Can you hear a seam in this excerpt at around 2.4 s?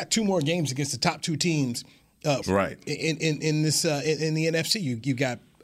yes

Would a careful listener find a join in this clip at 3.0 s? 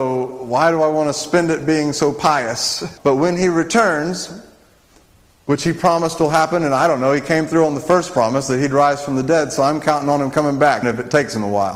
yes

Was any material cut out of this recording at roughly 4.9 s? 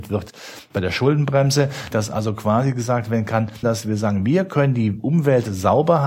no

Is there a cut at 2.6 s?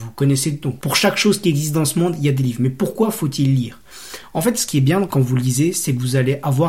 no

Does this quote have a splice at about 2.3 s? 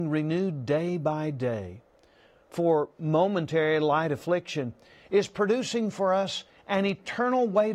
no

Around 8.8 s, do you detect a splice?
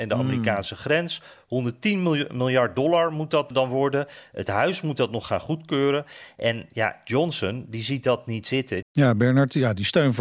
yes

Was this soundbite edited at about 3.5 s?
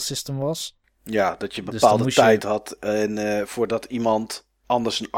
yes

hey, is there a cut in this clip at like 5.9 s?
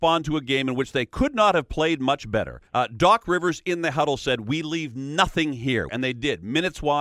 yes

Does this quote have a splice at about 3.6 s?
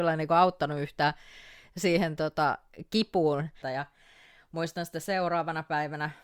yes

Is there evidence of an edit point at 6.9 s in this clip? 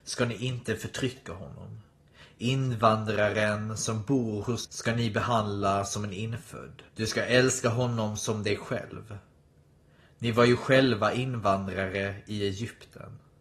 yes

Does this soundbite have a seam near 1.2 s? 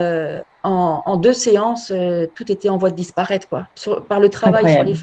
no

